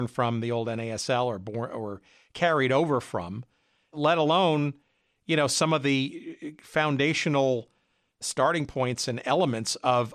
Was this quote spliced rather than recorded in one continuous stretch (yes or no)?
no